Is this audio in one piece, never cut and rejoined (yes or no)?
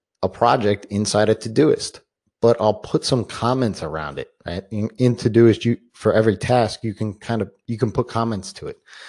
yes